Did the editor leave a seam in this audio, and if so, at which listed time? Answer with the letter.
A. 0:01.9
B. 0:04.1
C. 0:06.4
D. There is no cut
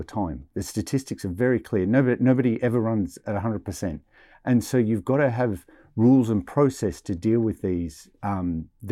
D